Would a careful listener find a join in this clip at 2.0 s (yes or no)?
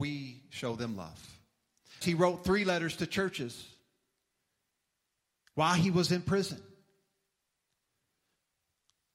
yes